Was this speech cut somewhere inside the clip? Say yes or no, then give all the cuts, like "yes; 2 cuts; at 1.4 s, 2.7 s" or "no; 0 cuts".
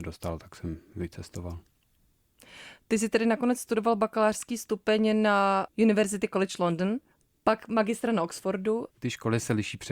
yes; 1 cut; at 8.9 s